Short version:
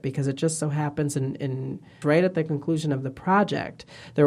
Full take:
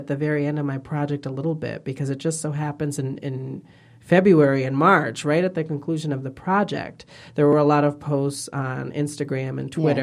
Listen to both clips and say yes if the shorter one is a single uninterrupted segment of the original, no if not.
no